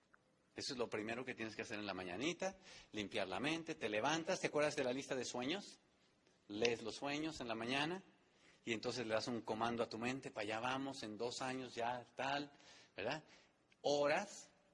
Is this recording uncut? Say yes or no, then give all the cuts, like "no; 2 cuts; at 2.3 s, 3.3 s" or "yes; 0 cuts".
yes; 0 cuts